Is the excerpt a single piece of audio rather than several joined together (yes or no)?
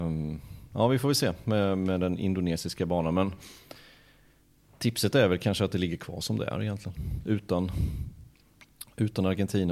yes